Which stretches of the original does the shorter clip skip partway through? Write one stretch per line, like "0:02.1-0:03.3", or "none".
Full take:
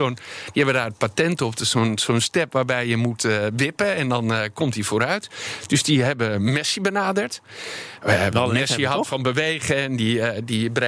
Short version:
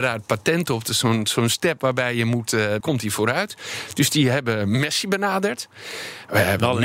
0:03.5-0:04.5